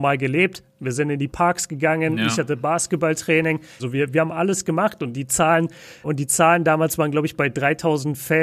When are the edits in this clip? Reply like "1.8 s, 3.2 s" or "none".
3.8 s, 6.0 s